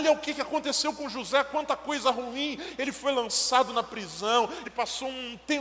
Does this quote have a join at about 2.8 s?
no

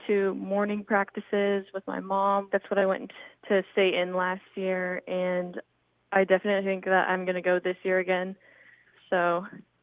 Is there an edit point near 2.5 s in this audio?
yes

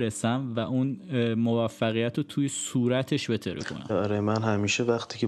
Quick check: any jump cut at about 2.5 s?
no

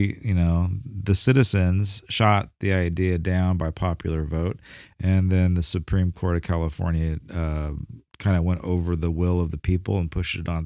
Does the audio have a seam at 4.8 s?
no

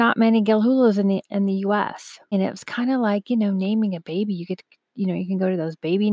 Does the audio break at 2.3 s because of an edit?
yes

